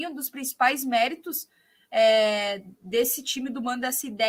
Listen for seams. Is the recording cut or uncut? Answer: uncut